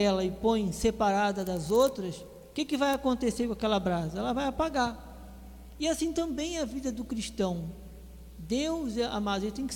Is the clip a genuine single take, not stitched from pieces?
yes; 0 cuts

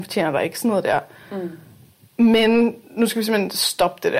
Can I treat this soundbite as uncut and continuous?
yes; 0 cuts

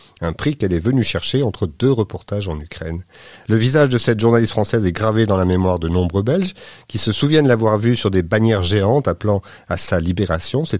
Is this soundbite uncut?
yes; 0 cuts

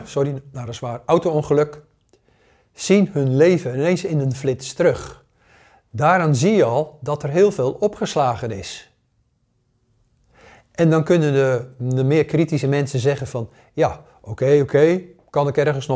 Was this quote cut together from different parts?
no; 0 cuts

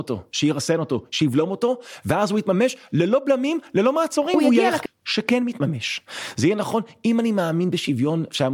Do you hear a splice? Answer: yes; 1 cut; at 4.9 s

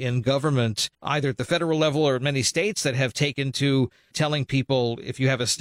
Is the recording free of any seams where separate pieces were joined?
no; 2 cuts; at 0.9 s, 4.1 s

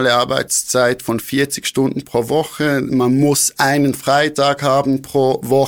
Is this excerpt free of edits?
yes; 0 cuts

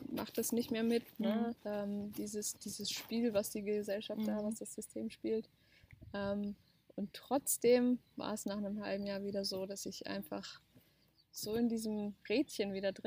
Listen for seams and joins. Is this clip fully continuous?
no; 1 cut; at 1.6 s

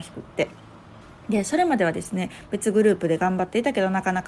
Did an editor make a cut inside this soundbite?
no; 0 cuts

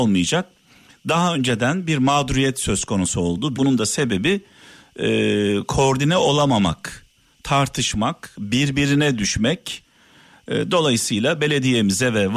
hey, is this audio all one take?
no; 2 cuts; at 3.5 s, 10.3 s

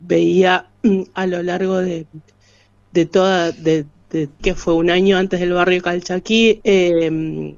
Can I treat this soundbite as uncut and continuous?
no; 2 cuts; at 4.4 s, 6.6 s

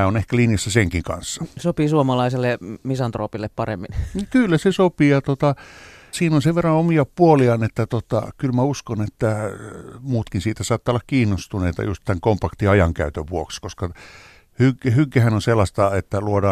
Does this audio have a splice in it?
yes; 1 cut; at 6.1 s

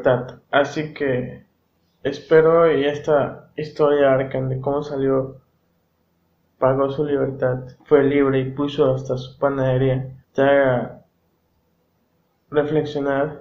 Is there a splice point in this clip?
yes; 3 cuts; at 6.4 s, 7.8 s, 10.2 s

